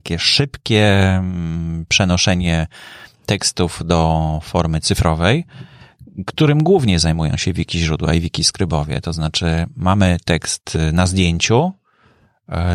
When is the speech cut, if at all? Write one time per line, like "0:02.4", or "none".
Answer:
none